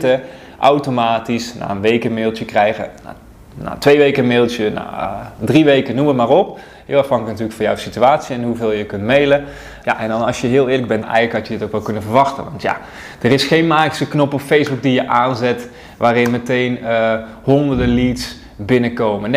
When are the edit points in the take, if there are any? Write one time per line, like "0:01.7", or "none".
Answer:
0:09.8
0:11.0